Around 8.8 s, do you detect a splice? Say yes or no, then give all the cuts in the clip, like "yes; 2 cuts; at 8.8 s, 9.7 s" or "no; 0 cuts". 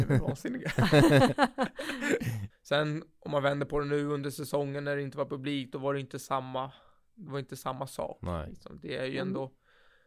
no; 1 cut; at 2.5 s